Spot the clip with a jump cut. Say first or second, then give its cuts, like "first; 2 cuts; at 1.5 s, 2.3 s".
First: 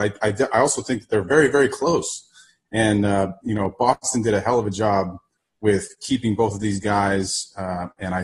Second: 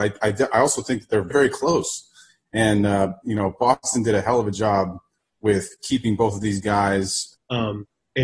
second; 2 cuts; at 1.3 s, 7.3 s